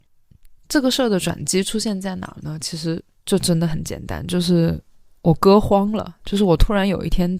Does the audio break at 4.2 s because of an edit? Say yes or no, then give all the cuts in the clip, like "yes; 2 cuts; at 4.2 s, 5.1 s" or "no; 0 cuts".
no; 0 cuts